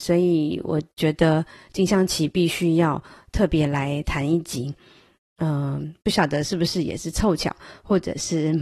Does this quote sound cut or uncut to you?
uncut